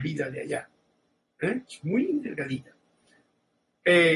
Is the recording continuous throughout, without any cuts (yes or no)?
yes